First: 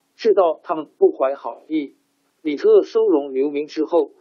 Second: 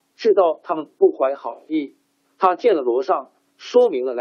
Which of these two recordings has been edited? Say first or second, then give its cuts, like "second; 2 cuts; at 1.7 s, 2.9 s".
first; 1 cut; at 2.3 s